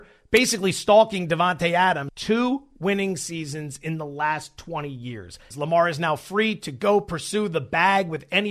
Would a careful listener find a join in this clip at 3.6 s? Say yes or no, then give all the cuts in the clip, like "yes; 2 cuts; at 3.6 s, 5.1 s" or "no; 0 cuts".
no; 2 cuts; at 2.1 s, 5.5 s